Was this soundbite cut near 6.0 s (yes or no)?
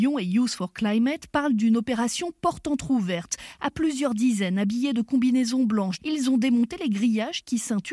yes